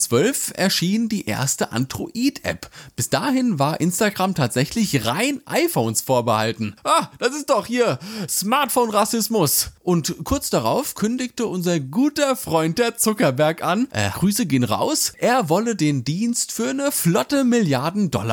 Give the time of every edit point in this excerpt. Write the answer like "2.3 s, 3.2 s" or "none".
14.1 s